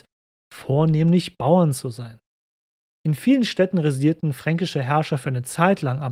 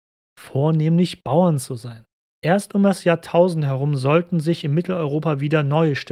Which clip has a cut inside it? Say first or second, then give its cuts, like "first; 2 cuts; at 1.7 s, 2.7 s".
second; 1 cut; at 2.3 s